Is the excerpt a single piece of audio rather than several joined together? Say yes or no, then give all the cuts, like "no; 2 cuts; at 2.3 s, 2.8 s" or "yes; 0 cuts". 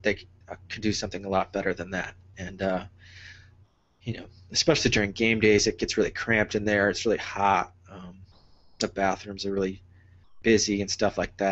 yes; 0 cuts